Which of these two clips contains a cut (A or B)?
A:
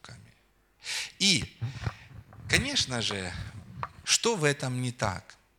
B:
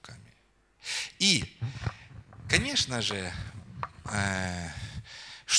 A